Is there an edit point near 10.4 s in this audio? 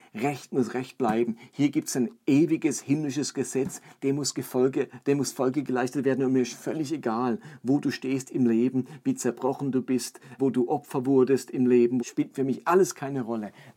yes; 2 cuts; at 10.4 s, 12.0 s

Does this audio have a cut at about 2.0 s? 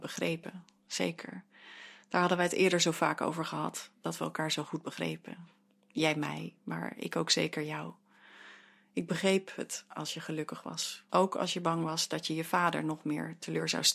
no; 1 cut; at 11.1 s

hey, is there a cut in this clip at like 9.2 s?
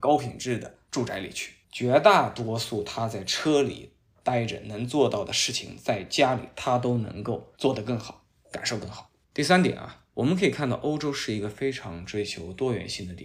yes; 2 cuts; at 1.6 s, 9.2 s

